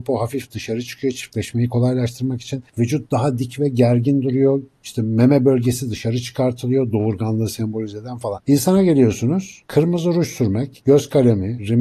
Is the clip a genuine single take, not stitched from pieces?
no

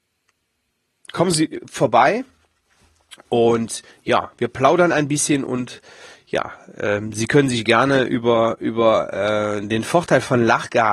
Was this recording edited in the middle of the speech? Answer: no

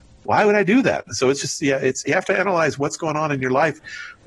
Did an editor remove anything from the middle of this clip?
yes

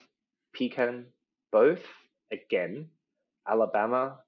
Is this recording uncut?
no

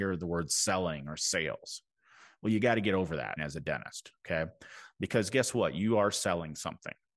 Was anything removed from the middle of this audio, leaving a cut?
yes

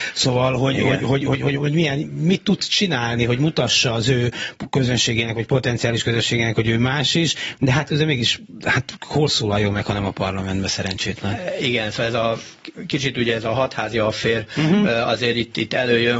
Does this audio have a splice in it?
no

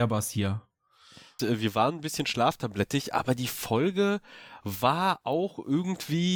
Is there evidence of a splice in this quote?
yes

